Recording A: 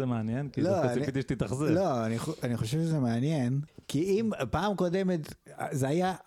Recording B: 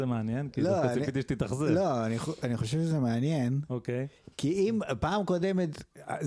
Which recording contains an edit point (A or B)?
A